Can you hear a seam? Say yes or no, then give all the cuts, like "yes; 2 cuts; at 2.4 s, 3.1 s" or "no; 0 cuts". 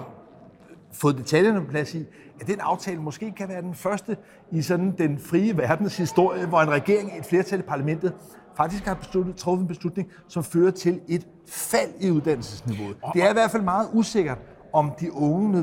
no; 0 cuts